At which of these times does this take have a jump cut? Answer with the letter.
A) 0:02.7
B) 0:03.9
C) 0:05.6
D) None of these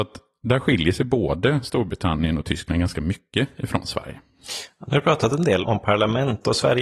C